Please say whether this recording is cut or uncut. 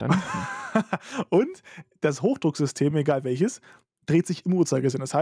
uncut